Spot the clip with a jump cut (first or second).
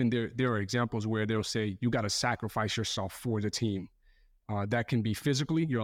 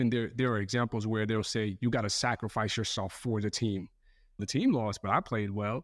second